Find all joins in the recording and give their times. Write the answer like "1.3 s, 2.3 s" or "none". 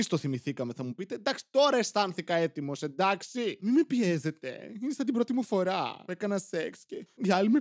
none